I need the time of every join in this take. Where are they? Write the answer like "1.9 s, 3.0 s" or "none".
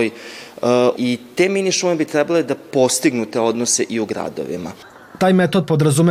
0.9 s, 5.2 s